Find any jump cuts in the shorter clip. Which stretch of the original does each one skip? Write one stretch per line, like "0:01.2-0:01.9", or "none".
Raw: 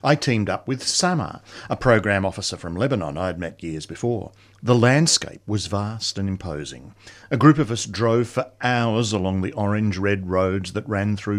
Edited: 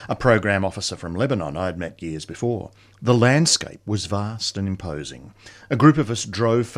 none